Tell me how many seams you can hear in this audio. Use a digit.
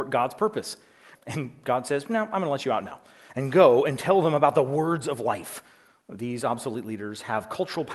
1